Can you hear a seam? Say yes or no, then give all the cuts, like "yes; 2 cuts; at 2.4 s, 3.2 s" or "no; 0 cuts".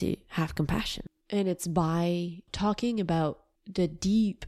yes; 2 cuts; at 1.2 s, 2.5 s